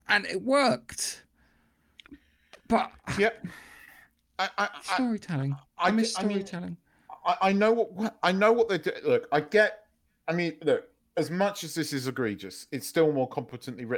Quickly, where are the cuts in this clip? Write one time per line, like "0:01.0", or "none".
0:05.7